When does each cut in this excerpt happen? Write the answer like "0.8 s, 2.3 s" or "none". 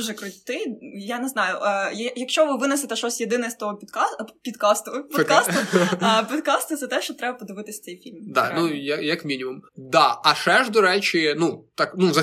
9.7 s

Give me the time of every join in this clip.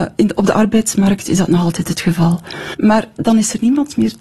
2.7 s

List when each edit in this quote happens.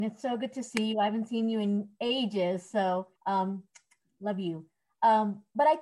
3.2 s

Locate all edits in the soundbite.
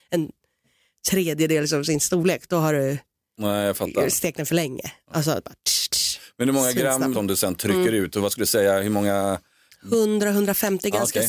7.1 s

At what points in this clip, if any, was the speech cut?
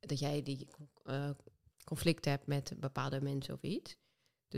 1.7 s

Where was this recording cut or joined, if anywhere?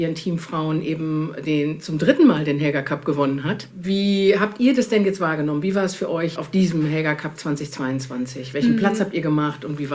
none

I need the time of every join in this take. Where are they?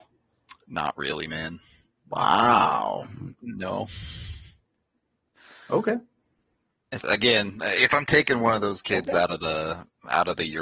3.4 s, 7.0 s

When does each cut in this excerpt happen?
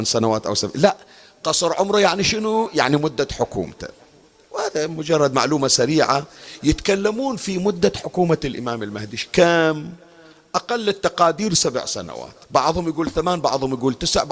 12.4 s

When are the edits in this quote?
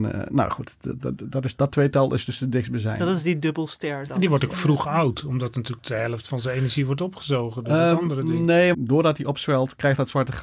8.7 s

